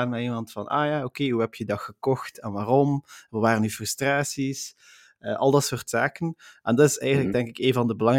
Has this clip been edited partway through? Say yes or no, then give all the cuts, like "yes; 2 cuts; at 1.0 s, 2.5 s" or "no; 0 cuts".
no; 0 cuts